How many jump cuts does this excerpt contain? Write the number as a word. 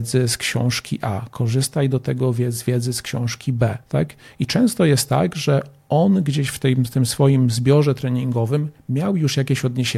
one